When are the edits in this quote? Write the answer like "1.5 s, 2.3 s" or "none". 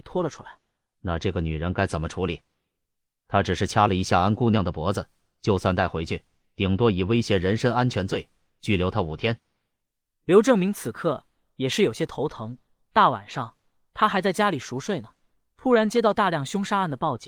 0.9 s